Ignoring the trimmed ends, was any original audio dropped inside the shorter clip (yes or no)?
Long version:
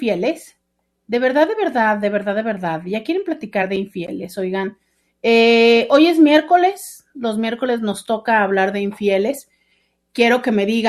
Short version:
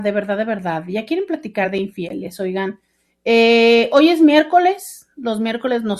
no